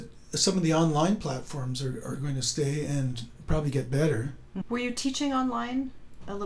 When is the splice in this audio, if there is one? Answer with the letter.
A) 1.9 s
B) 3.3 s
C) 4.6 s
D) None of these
C